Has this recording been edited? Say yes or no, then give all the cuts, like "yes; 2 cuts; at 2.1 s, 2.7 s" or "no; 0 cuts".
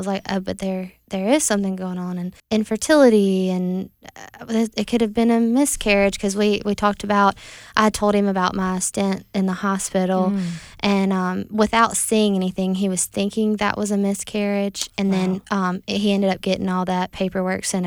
yes; 1 cut; at 2.4 s